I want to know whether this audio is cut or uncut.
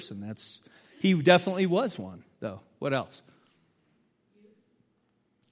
uncut